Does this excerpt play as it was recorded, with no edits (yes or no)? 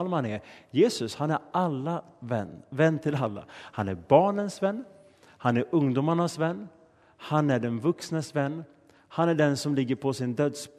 yes